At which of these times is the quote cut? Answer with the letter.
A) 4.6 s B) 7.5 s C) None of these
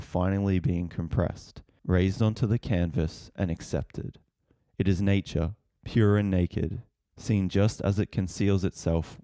A